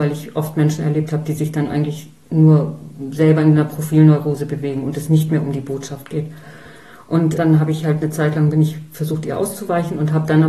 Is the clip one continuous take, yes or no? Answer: no